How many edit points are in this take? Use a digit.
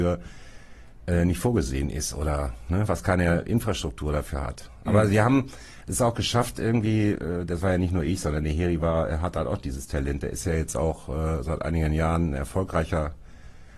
1